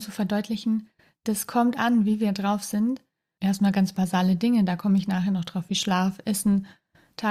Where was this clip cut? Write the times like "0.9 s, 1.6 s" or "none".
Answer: 3.4 s